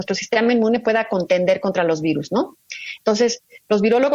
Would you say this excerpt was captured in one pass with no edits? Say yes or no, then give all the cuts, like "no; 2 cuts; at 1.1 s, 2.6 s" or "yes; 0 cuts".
yes; 0 cuts